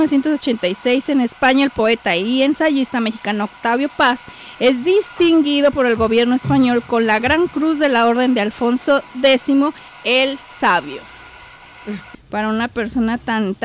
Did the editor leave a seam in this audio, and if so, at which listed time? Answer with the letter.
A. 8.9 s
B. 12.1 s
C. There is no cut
B